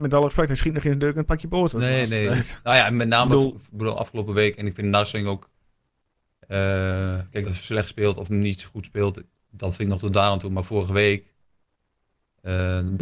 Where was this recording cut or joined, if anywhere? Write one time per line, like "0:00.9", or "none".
0:07.5